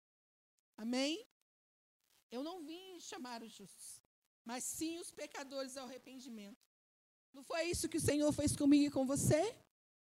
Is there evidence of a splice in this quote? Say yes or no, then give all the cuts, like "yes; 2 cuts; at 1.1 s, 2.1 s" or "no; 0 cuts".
no; 0 cuts